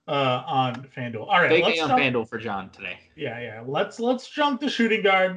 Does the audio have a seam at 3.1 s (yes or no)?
no